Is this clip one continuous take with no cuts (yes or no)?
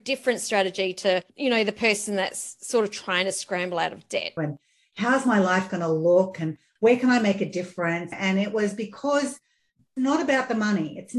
no